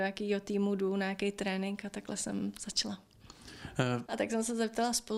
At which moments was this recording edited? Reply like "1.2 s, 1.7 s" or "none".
4.1 s